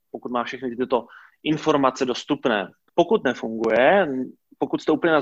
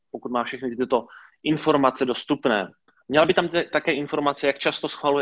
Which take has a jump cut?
first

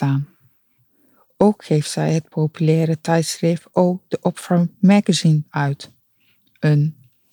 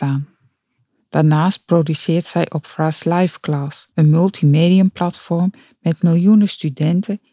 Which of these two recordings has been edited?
second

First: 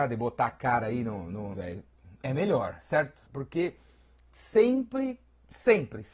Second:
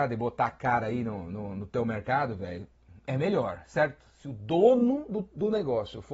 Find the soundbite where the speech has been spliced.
first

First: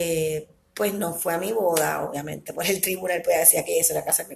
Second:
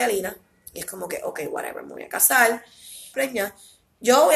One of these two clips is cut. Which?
second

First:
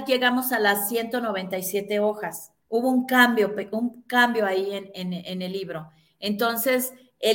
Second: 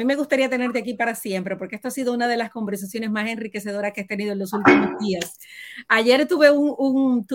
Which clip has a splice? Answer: first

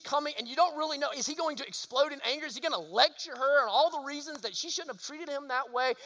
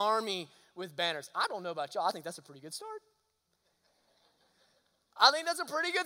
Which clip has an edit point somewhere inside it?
first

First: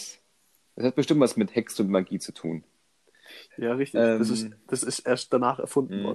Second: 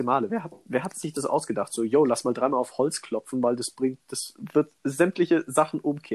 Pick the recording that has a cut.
first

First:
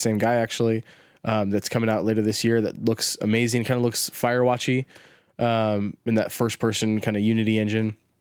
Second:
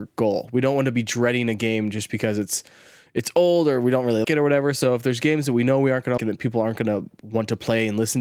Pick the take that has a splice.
second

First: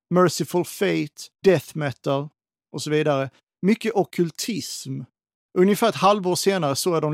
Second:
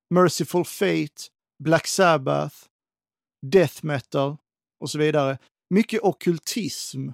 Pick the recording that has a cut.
first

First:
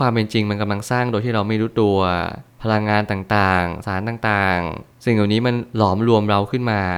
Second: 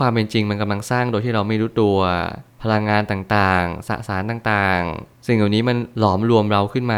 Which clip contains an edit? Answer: first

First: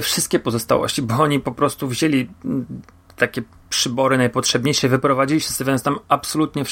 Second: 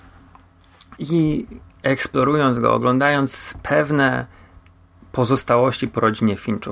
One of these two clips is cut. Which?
second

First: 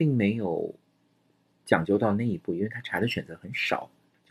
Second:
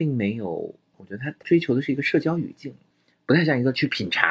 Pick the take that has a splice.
second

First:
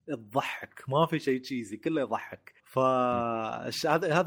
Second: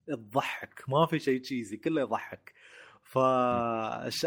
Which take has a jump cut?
first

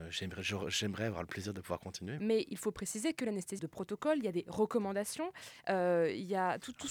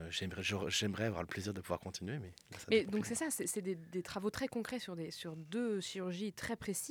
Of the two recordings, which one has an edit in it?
first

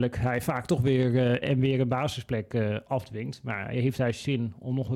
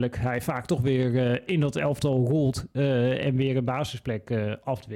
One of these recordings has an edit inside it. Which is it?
first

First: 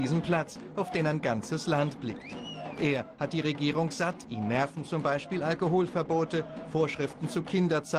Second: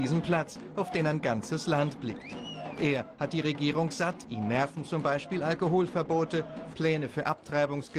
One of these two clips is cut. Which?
second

